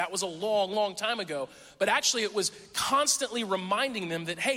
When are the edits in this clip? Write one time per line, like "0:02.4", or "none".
none